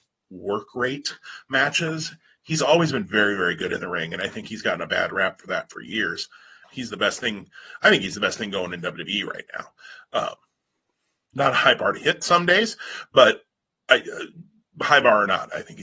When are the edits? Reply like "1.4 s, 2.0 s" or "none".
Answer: 6.6 s

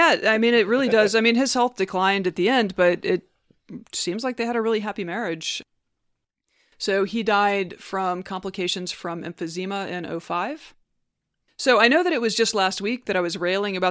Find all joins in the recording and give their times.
none

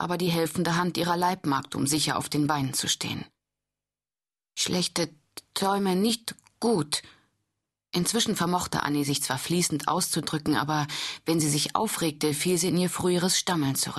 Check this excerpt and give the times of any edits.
none

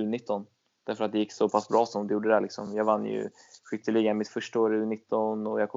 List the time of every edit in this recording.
none

